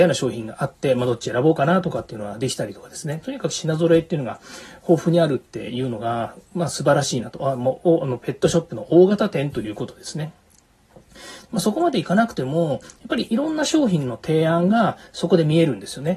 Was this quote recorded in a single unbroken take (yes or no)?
no